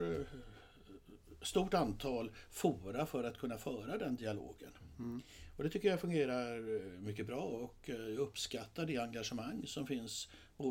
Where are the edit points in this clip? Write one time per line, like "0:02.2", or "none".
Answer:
none